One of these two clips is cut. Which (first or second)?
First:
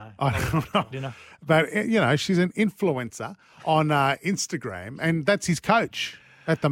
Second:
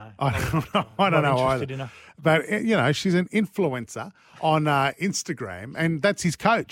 first